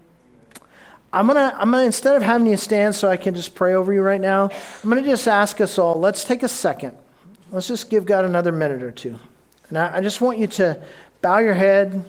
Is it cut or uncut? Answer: uncut